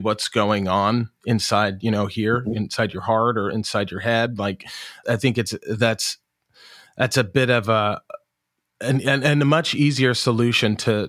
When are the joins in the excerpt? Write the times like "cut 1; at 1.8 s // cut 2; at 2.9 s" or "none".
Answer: cut 1; at 5.0 s